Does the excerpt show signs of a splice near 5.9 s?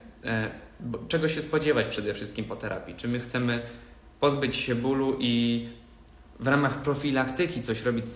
no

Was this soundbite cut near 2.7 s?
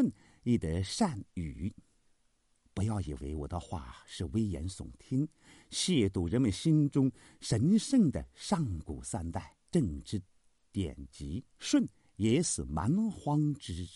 no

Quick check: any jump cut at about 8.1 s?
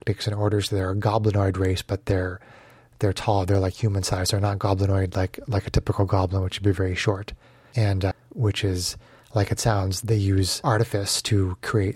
yes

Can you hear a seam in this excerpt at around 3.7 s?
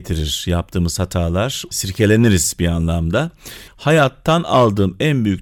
yes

